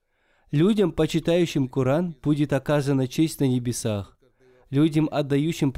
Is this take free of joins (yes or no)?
yes